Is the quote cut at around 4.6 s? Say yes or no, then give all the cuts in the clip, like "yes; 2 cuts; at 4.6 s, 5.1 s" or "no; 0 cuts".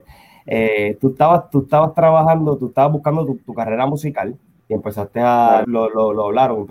yes; 2 cuts; at 4.6 s, 5.6 s